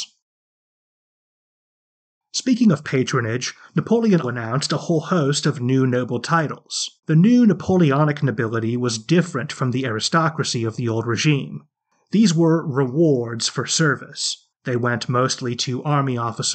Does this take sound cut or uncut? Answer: cut